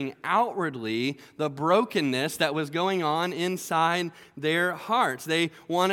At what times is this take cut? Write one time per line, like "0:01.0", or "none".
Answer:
none